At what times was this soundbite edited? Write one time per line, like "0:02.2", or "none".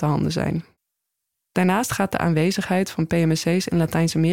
0:01.4